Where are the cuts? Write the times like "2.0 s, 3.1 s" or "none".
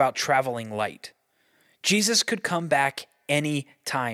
none